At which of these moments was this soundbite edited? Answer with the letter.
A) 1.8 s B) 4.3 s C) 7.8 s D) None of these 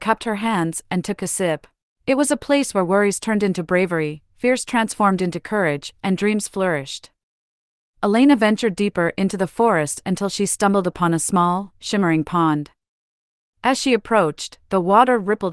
A